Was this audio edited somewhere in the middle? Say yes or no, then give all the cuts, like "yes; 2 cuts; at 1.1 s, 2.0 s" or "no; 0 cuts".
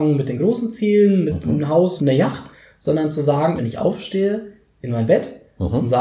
yes; 2 cuts; at 2.0 s, 3.6 s